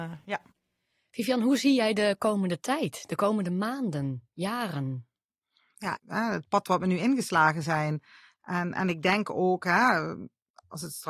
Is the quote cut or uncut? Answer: cut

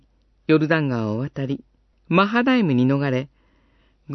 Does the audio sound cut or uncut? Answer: cut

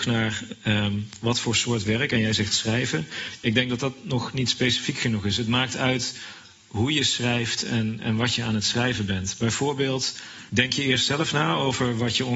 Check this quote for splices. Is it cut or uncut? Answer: cut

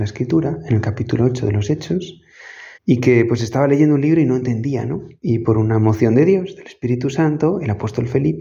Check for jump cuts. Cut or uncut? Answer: cut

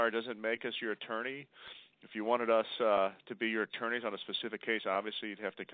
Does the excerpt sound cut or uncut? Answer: uncut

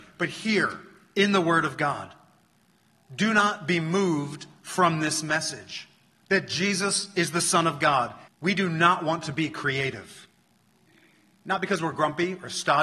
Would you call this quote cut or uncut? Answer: cut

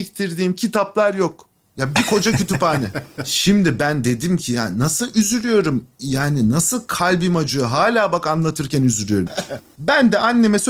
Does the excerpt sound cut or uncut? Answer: cut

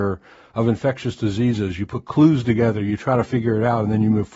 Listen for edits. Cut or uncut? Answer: uncut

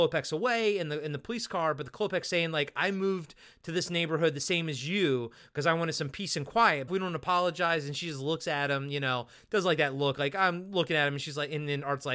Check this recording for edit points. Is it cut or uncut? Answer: cut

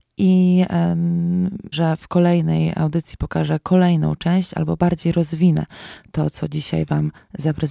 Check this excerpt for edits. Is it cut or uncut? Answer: cut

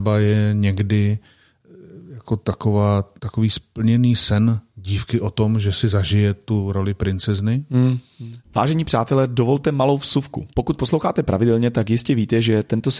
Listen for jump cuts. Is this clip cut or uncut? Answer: cut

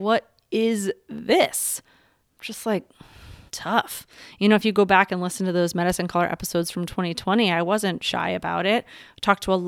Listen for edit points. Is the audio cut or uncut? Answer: cut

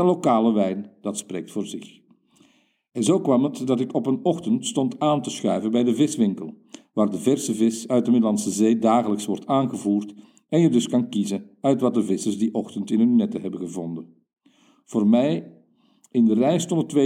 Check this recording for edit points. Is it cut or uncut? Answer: uncut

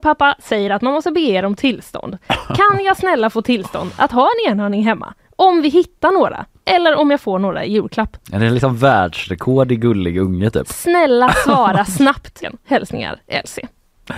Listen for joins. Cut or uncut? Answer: cut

